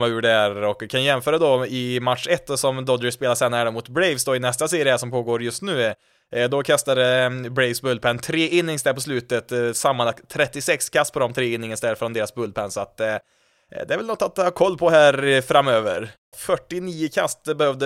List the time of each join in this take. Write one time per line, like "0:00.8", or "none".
0:16.3